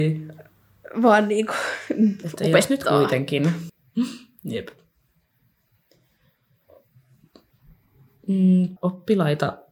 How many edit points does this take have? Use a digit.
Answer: 2